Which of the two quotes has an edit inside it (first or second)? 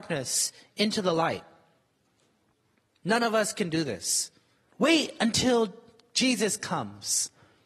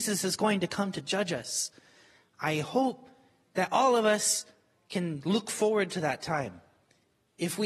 first